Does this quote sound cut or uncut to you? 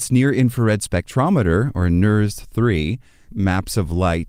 cut